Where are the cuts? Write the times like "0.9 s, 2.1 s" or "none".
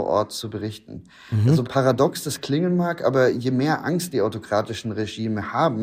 none